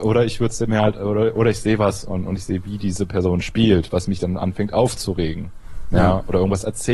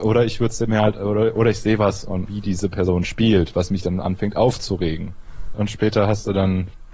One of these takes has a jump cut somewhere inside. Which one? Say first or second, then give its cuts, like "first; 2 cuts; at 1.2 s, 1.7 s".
second; 2 cuts; at 2.3 s, 5.5 s